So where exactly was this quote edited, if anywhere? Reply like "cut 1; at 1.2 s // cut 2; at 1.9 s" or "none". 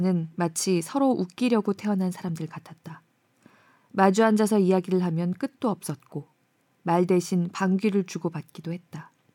none